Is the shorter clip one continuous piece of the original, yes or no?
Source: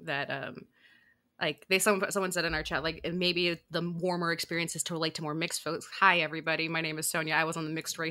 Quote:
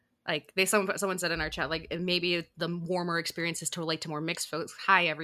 yes